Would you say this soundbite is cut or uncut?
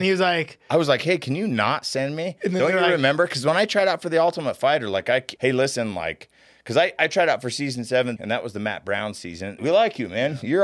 cut